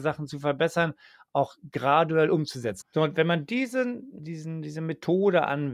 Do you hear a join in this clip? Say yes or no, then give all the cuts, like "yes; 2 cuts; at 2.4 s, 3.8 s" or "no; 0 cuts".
yes; 2 cuts; at 2.8 s, 4.2 s